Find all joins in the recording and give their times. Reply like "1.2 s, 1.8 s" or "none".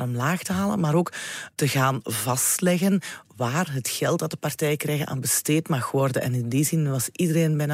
none